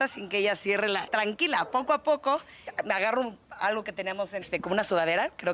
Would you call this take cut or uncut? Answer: cut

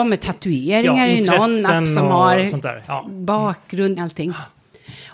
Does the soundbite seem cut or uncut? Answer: cut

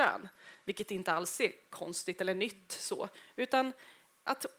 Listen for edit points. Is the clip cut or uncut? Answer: uncut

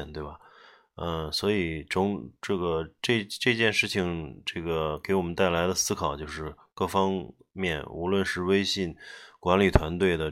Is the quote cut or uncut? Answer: uncut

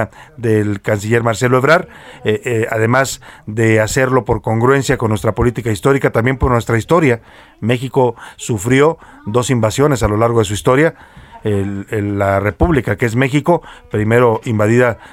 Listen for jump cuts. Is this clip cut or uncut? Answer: uncut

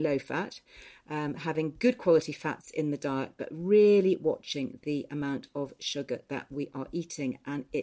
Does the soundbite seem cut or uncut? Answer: uncut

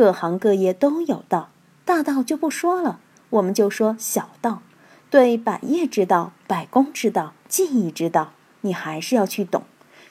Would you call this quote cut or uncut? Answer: uncut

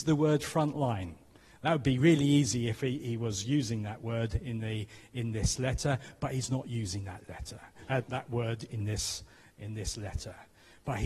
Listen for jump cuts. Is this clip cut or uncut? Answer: cut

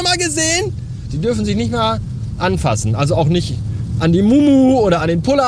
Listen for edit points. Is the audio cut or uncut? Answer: cut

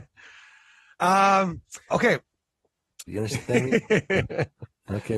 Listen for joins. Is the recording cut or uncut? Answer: cut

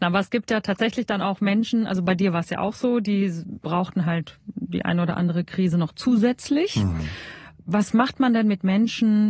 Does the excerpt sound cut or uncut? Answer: uncut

